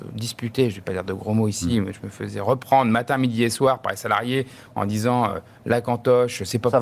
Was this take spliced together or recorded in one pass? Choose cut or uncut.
uncut